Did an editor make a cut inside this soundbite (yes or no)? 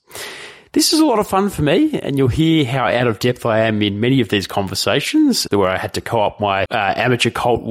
yes